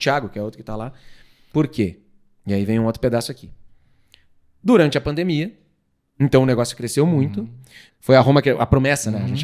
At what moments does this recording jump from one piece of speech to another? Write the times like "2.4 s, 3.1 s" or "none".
1.5 s, 7.9 s